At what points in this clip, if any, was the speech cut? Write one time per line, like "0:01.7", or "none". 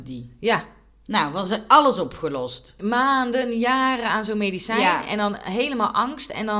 none